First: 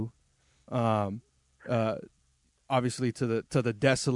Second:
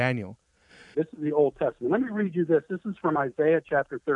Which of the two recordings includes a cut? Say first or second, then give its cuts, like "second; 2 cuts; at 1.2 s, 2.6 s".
second; 1 cut; at 0.9 s